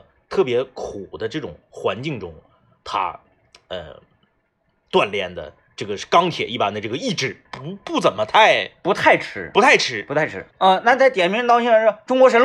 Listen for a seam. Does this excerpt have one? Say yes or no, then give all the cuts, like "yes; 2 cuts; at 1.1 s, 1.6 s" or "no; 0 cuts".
yes; 2 cuts; at 7.5 s, 10.5 s